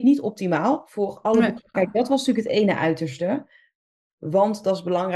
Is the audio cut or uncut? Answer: cut